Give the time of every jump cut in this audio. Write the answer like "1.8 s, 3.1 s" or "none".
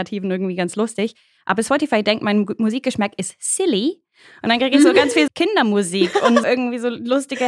5.3 s, 6.4 s